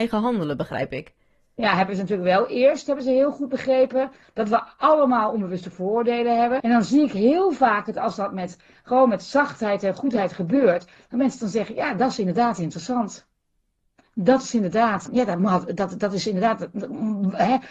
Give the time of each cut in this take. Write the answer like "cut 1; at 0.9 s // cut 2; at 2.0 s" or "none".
cut 1; at 6.6 s // cut 2; at 15.1 s